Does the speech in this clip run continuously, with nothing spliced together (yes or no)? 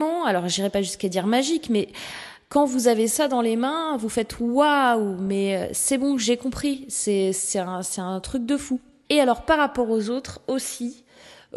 no